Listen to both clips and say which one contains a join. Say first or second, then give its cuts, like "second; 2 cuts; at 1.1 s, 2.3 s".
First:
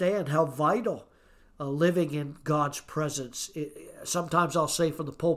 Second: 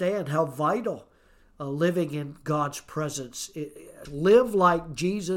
second; 1 cut; at 4.1 s